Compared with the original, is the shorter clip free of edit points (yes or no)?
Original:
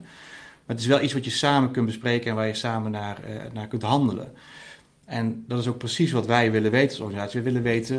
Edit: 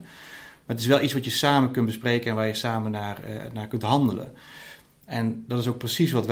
yes